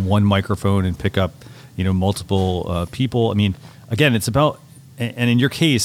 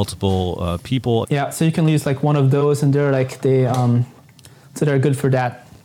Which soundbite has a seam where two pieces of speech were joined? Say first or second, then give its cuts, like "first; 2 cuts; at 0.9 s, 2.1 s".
second; 1 cut; at 1.2 s